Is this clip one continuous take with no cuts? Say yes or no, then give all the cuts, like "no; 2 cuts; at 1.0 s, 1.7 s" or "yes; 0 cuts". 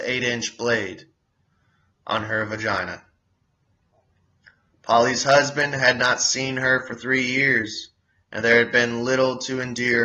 yes; 0 cuts